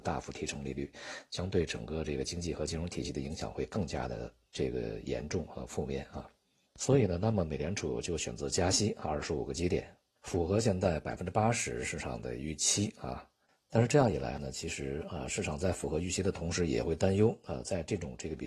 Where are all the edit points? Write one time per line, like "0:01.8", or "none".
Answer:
none

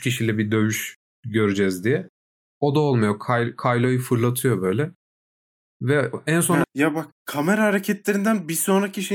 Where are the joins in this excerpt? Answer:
0:06.6

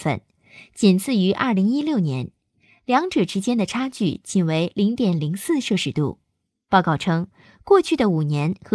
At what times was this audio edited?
none

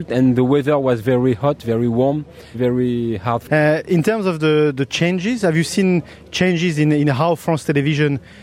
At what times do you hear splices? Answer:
0:02.5

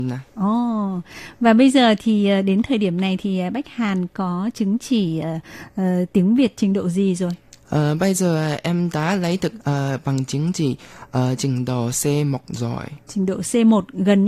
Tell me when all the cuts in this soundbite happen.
none

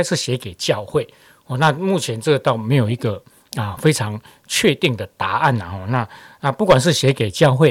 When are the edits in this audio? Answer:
none

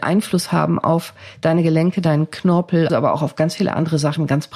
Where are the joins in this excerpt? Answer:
0:02.9

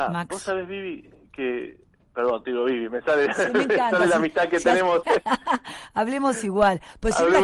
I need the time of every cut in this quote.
0:05.0

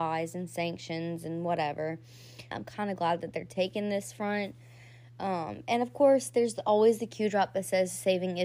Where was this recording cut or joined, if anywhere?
0:02.5

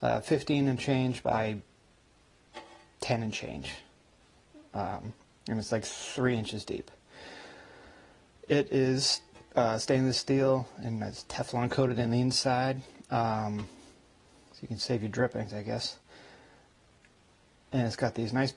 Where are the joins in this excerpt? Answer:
none

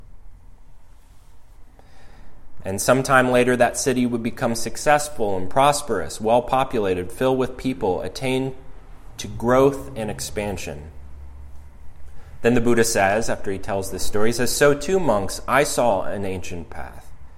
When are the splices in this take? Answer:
0:02.6

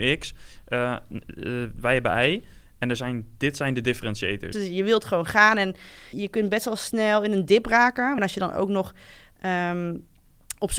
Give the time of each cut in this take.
0:04.5
0:06.1
0:08.2

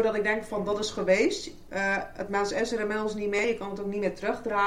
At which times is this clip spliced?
none

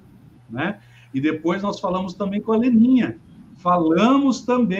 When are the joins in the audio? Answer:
none

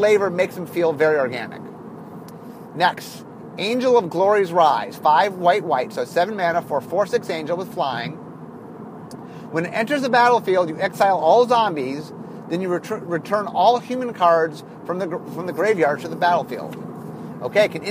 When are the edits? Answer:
none

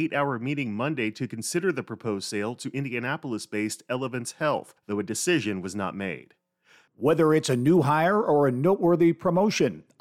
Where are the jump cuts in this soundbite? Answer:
0:06.9

